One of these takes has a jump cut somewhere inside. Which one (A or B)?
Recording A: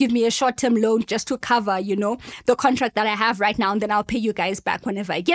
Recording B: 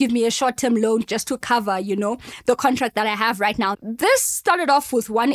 B